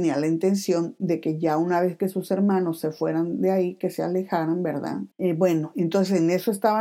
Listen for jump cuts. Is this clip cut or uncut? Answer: cut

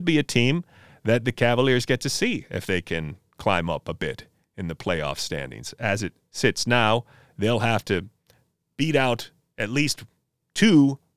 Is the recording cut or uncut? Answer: uncut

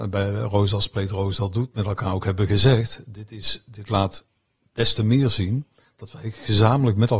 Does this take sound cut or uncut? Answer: uncut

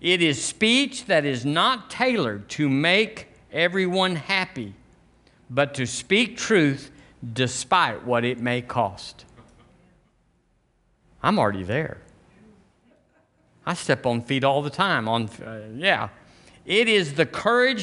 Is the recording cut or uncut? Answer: uncut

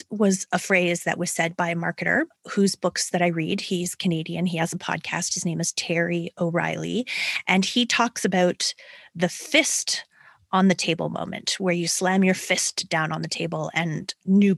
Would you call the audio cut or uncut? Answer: uncut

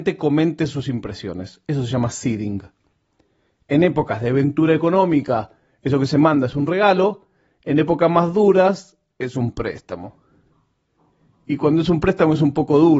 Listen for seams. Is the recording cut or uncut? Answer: uncut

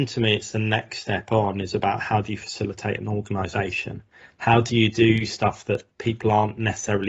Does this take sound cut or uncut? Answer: uncut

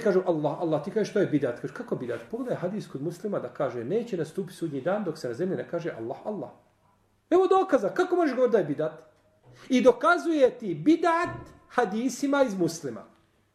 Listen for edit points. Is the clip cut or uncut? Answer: uncut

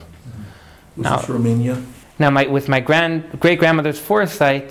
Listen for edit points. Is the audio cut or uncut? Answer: cut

